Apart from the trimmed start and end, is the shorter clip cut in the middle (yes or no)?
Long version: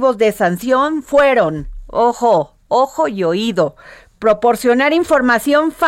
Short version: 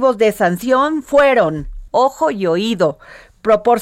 yes